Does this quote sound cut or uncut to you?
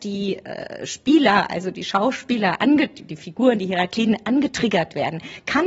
uncut